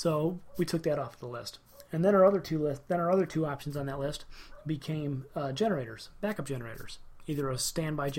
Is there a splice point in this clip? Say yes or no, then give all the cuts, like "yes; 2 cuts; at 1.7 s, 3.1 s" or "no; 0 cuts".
no; 0 cuts